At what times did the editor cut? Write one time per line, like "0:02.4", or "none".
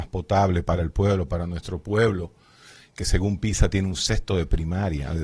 none